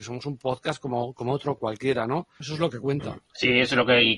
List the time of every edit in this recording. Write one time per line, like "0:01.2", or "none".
0:02.4